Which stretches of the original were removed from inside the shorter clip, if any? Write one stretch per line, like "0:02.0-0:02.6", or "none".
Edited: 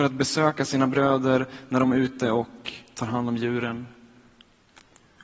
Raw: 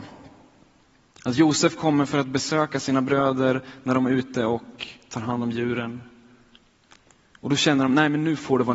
none